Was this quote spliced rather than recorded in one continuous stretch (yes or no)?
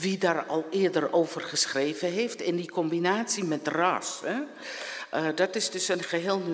no